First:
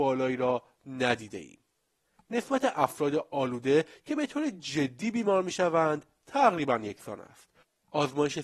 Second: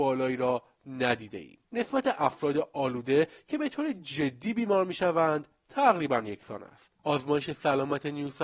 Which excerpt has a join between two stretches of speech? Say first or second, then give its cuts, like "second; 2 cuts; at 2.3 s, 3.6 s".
second; 2 cuts; at 1.6 s, 6.9 s